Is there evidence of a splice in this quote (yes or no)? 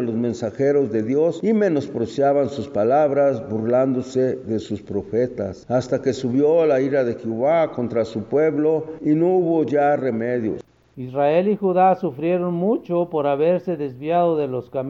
no